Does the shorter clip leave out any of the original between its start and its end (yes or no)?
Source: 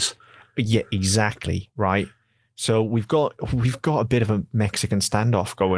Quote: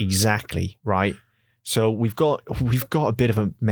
no